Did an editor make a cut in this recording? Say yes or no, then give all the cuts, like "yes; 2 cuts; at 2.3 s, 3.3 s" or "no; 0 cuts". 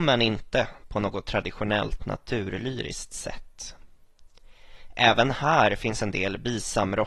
no; 0 cuts